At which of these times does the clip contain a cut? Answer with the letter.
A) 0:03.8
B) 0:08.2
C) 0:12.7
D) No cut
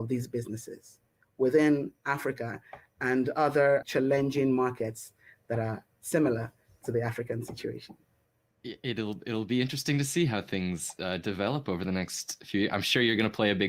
A